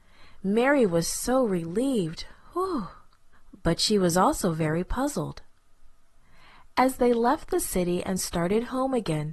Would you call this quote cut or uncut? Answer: uncut